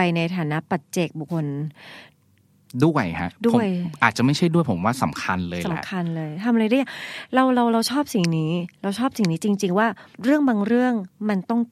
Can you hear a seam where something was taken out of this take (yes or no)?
yes